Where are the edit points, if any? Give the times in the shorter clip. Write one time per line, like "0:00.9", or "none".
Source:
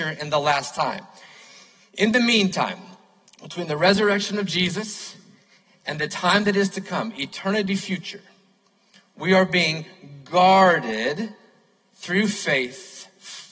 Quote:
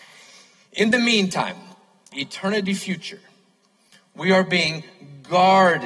0:02.1